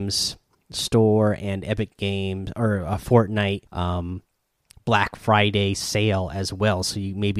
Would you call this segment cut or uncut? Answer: cut